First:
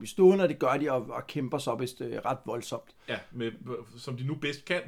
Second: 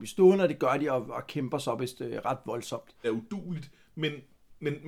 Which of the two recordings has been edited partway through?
second; 1 cut; at 3.0 s

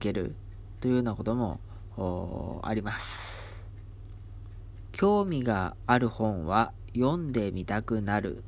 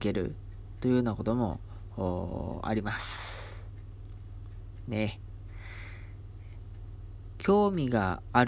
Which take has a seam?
first; 1 cut; at 4.9 s

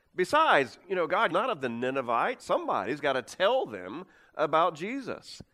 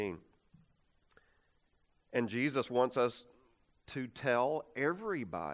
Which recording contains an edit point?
first; 2 cuts; at 1.3 s, 2.4 s

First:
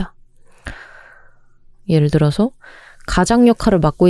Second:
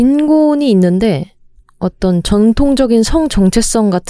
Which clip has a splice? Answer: first; 1 cut; at 1.7 s

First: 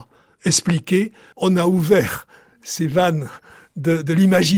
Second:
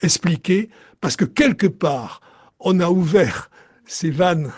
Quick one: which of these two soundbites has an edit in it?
first; 1 cut; at 1.3 s

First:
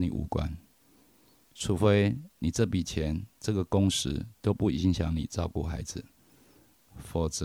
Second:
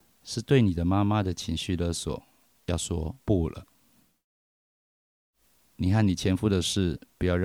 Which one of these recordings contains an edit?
second; 1 cut; at 3.2 s

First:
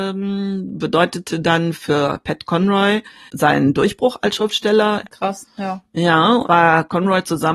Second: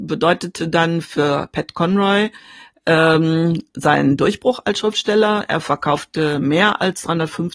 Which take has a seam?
first; 3 cuts; at 3.3 s, 5.0 s, 6.4 s

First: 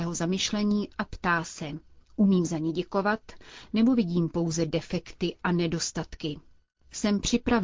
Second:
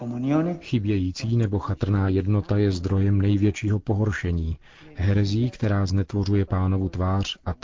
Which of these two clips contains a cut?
first; 1 cut; at 2.0 s

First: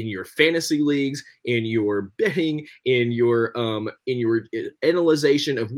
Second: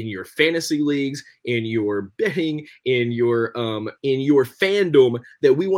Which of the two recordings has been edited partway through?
second; 1 cut; at 4.0 s

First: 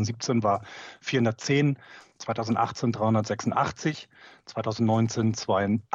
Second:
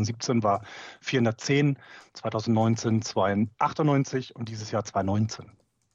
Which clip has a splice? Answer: second; 1 cut; at 2.1 s

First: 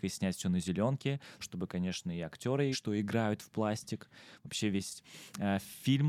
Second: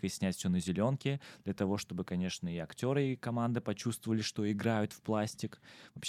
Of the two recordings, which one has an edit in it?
first; 2 cuts; at 1.4 s, 2.7 s

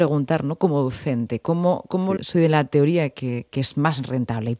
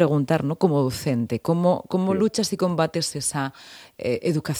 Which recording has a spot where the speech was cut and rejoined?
first; 1 cut; at 2.2 s

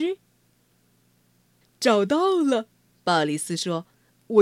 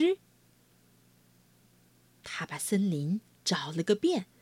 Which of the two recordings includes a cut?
first; 1 cut; at 1.6 s

